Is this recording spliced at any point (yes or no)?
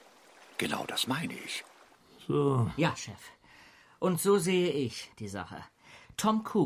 yes